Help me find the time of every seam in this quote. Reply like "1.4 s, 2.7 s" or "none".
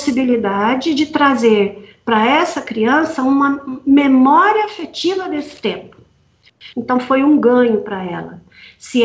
6.7 s

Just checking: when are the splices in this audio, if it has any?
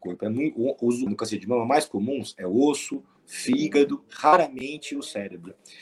1.1 s, 3.2 s

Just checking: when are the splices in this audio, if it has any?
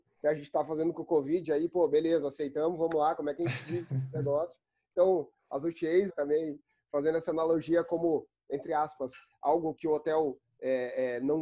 6.1 s, 9.8 s

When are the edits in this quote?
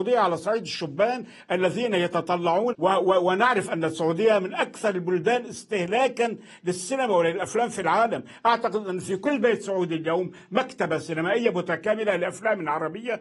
2.7 s

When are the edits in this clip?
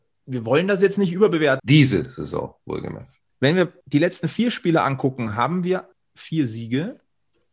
1.6 s, 3.3 s

